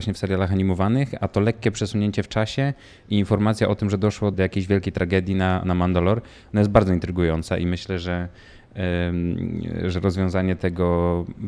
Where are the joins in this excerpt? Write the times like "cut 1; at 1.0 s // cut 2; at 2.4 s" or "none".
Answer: cut 1; at 1.2 s // cut 2; at 4.3 s